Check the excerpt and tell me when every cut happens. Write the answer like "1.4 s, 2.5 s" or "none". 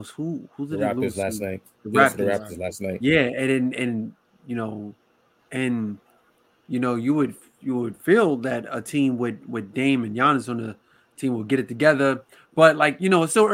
5.4 s